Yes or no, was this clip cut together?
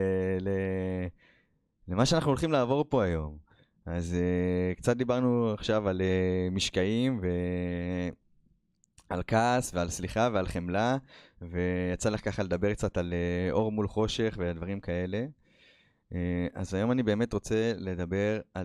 no